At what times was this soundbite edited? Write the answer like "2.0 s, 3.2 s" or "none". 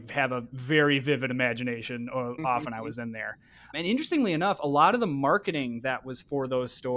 2.4 s, 3.7 s